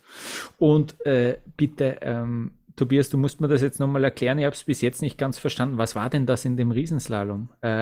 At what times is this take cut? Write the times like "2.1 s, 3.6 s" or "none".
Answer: none